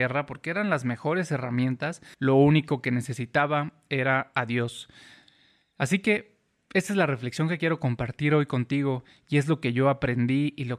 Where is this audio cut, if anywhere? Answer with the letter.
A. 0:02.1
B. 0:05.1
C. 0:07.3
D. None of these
A